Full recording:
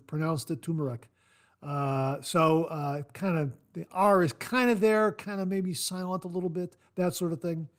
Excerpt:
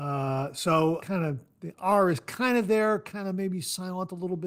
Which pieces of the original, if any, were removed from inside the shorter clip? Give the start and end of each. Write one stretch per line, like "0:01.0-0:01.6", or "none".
0:02.7-0:03.1